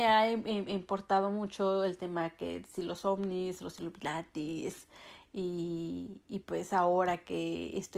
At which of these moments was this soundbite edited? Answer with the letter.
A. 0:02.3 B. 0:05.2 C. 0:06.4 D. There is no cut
D